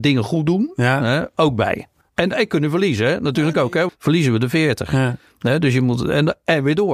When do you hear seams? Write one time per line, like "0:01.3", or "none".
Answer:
0:03.9